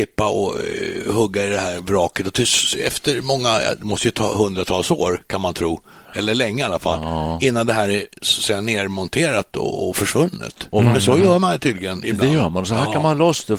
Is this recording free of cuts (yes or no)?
yes